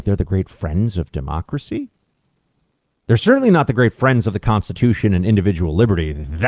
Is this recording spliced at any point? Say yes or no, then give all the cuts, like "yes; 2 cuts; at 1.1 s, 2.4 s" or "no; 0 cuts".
no; 0 cuts